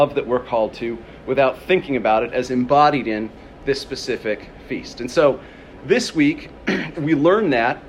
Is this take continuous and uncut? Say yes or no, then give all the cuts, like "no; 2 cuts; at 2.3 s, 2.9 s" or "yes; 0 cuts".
yes; 0 cuts